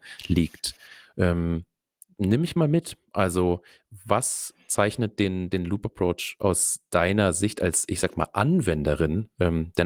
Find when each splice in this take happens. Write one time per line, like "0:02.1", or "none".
none